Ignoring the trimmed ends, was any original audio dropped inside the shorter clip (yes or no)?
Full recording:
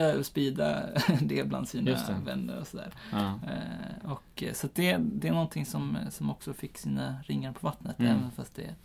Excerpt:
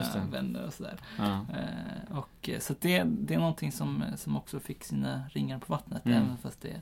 no